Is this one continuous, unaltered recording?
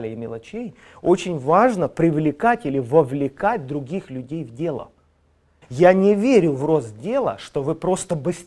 no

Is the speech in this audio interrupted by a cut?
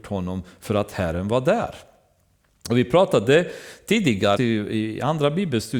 yes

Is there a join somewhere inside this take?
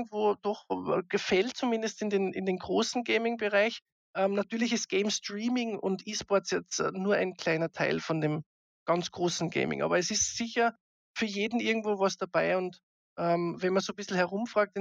no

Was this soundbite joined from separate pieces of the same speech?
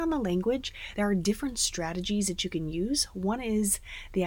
no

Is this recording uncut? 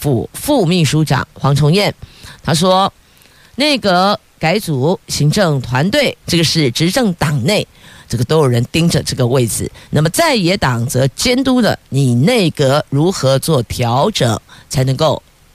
no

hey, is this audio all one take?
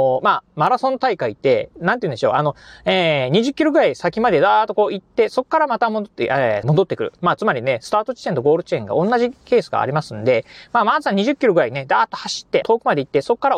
no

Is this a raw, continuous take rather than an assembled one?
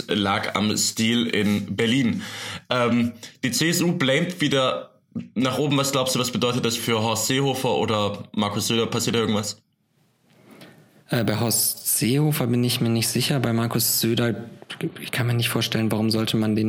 no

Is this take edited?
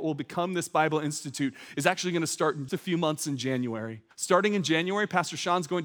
yes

